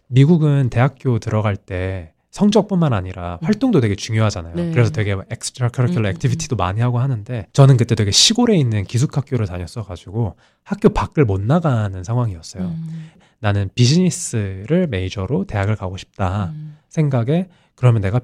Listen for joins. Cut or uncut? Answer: cut